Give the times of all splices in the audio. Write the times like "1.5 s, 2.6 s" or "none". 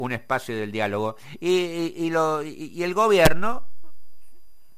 none